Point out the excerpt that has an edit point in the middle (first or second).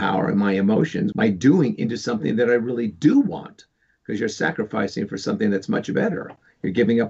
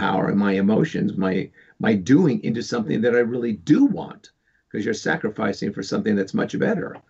first